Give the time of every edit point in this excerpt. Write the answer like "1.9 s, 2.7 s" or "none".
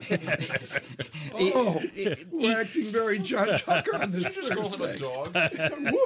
4.0 s